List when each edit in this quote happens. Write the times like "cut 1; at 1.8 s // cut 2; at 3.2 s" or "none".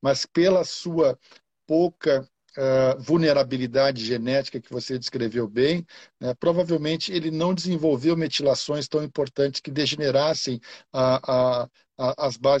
none